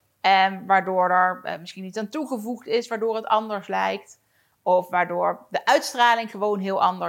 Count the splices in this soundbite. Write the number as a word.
zero